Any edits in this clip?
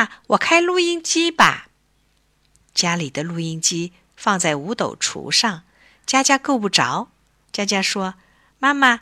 yes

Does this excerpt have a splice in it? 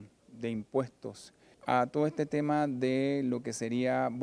yes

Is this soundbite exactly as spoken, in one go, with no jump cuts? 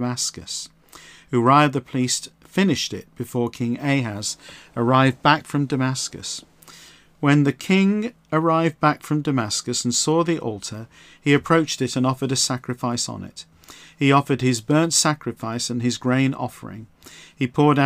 yes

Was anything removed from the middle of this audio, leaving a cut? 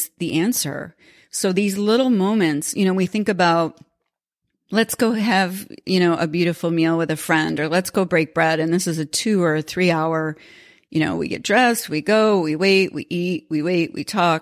no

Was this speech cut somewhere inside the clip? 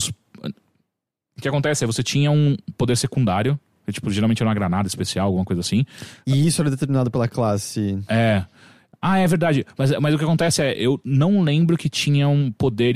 no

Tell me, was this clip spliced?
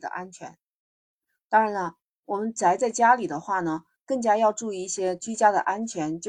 no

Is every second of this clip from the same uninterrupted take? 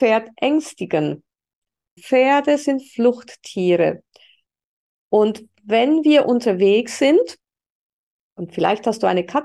no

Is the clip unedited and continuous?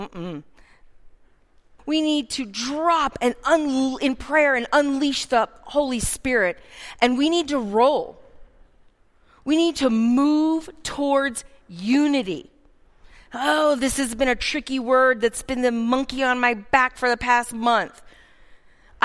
no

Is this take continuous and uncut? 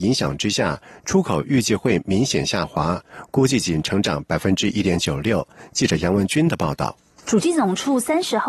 yes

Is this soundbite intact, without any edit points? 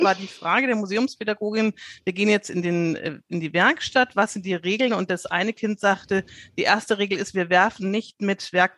yes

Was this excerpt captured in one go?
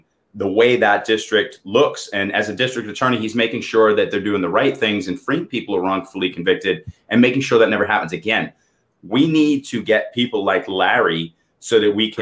yes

